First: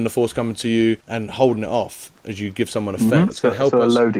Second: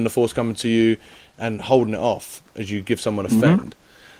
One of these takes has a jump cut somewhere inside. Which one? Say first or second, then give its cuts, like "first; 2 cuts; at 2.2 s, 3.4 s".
first; 2 cuts; at 1.0 s, 3.3 s